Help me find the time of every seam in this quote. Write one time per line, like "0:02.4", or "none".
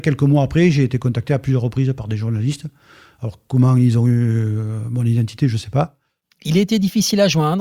0:06.2